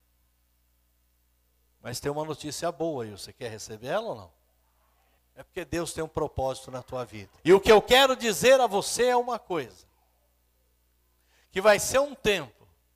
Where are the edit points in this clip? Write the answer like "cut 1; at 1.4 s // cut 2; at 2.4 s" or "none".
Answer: cut 1; at 5.2 s // cut 2; at 7.4 s

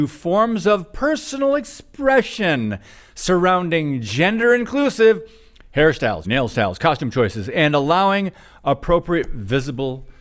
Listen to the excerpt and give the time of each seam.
cut 1; at 6.2 s

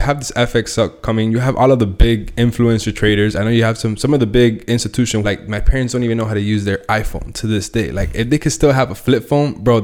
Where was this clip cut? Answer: cut 1; at 5.2 s

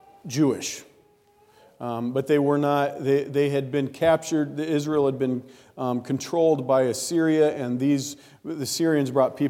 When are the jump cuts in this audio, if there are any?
none

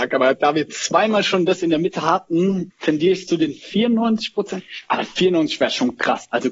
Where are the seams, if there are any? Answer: cut 1; at 2.7 s

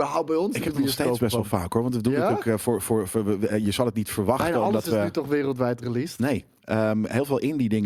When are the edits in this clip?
none

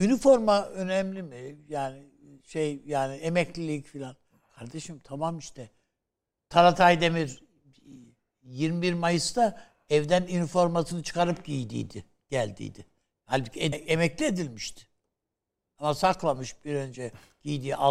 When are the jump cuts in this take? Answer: cut 1; at 13.7 s

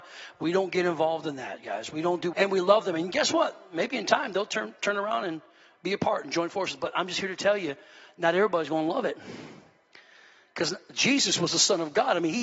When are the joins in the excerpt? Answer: cut 1; at 2.3 s

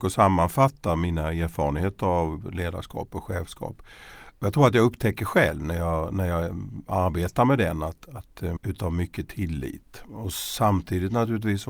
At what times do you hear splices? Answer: cut 1; at 8.6 s

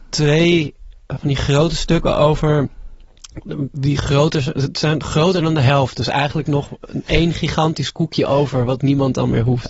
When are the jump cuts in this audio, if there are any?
none

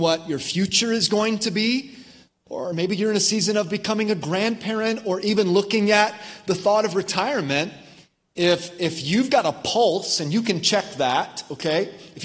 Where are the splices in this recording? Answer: none

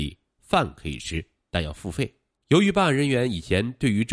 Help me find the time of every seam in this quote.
cut 1; at 2.4 s

